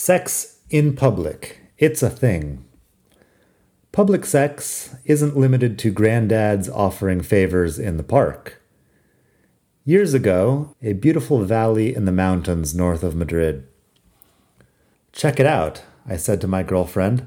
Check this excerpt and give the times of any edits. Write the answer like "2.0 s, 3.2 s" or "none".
10.7 s, 14.9 s